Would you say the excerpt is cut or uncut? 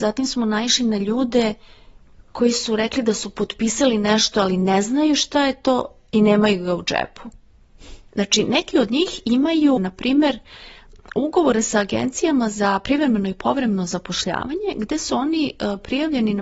cut